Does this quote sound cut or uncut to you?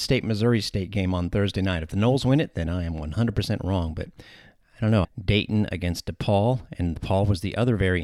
cut